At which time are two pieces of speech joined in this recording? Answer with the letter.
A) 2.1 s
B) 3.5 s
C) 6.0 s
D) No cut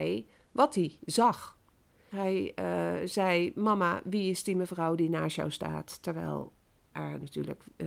A